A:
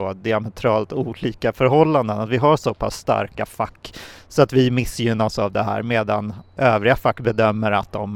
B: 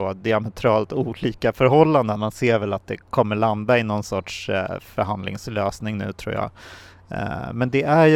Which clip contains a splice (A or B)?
B